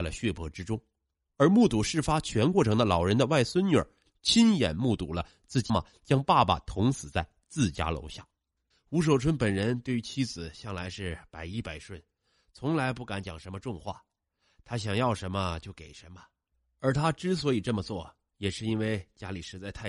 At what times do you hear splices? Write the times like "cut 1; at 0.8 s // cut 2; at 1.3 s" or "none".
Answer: cut 1; at 5.7 s // cut 2; at 8.7 s